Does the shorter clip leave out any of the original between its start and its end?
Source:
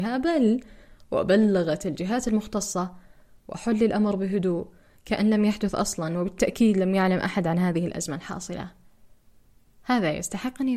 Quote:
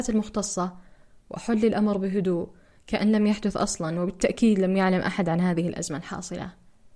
no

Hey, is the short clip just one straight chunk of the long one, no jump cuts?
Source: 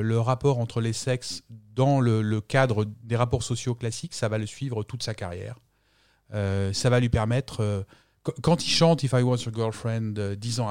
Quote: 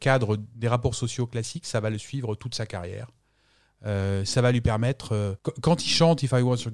no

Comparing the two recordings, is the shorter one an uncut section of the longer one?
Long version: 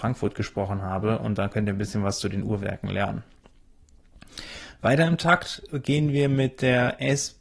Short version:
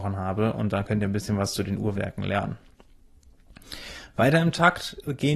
yes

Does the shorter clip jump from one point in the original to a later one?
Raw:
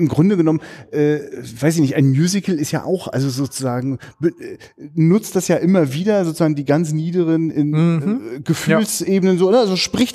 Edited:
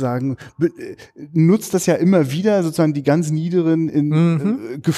no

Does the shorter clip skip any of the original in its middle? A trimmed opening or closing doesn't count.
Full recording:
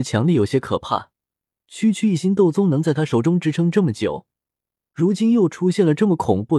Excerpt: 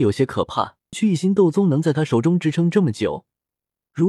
yes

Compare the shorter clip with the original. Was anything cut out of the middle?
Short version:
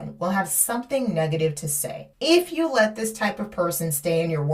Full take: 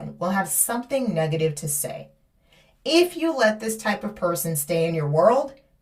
yes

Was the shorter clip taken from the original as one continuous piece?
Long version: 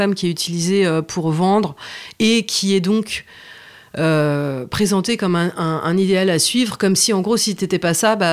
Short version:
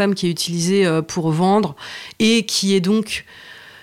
yes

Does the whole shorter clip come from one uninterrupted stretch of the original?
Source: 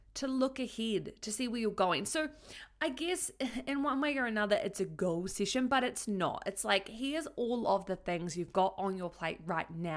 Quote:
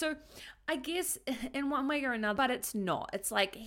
no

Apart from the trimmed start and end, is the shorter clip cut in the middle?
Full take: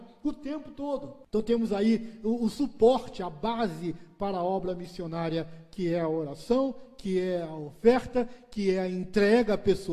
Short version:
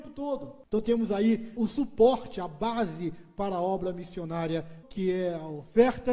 yes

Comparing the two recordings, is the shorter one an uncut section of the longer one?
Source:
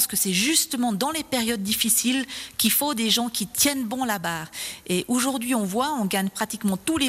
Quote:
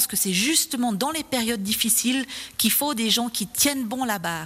yes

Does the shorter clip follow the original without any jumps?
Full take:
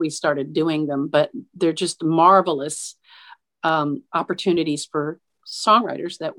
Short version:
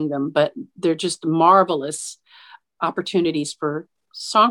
no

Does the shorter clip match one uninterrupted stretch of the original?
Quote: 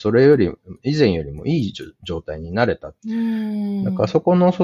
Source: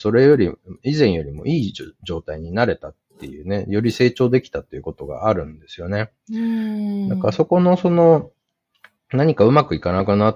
no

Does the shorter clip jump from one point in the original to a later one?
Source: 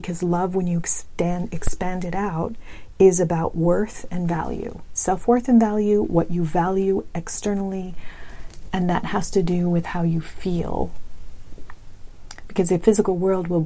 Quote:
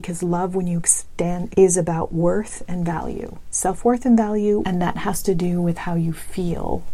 yes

